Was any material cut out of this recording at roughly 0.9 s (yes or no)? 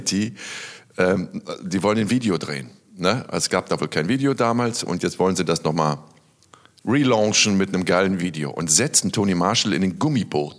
no